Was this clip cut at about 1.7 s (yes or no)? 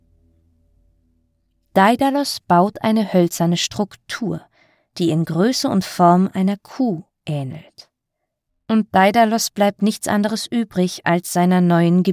no